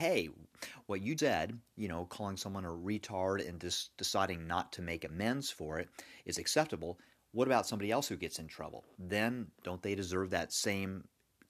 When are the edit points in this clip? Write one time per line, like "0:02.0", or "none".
0:01.2